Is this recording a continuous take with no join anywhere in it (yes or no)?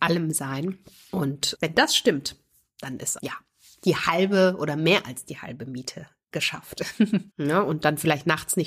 no